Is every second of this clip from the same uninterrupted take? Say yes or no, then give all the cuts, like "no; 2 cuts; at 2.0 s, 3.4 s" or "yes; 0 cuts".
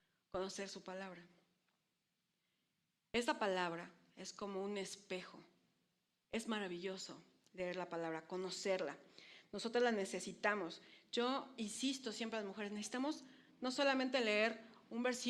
no; 1 cut; at 6.2 s